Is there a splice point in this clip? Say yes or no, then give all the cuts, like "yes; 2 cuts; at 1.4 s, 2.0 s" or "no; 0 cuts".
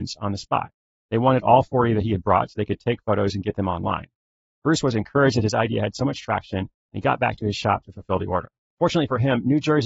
yes; 1 cut; at 8.6 s